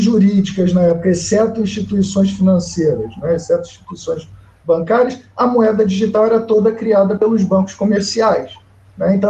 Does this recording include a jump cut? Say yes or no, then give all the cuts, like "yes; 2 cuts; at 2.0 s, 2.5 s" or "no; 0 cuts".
no; 0 cuts